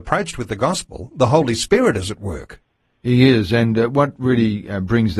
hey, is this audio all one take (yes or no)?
yes